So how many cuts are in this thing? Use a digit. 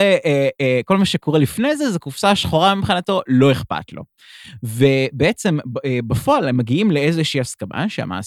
0